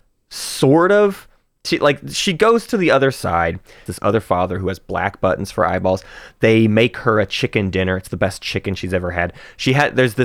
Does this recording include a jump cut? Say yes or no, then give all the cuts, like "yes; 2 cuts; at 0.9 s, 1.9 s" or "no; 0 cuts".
yes; 1 cut; at 3.9 s